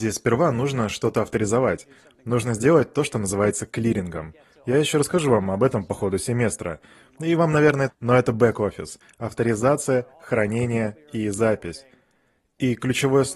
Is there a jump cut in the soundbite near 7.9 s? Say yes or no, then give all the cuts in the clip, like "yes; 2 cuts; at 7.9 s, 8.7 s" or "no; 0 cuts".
yes; 1 cut; at 7.9 s